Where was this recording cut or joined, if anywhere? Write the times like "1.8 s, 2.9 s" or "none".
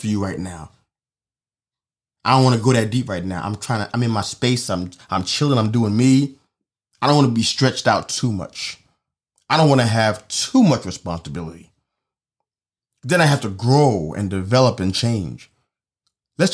none

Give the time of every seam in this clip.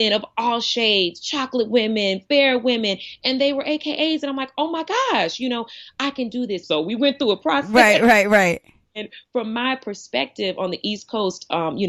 6.6 s, 8.8 s

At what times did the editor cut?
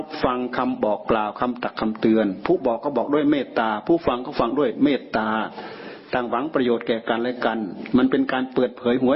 none

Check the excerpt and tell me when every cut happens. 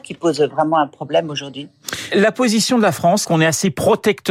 2.1 s, 3.2 s

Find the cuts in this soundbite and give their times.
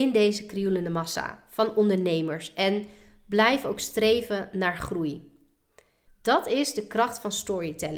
6.1 s

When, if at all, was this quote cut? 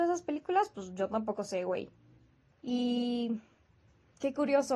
2.5 s

